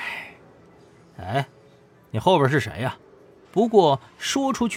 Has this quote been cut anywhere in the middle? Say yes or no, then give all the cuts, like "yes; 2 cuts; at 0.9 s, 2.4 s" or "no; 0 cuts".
yes; 1 cut; at 3.4 s